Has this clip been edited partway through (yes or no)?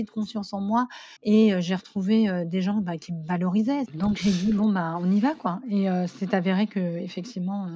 yes